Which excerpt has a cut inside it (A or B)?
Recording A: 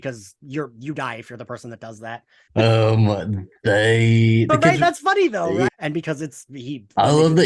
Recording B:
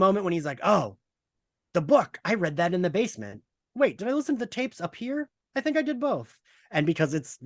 A